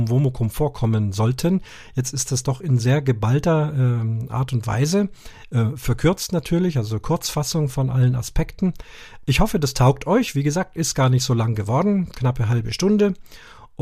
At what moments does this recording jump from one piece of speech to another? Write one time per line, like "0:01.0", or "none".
none